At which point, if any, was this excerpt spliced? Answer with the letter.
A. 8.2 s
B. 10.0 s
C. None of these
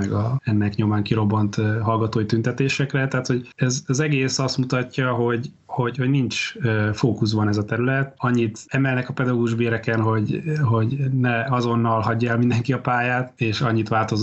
A